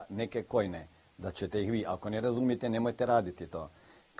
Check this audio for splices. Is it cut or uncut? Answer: uncut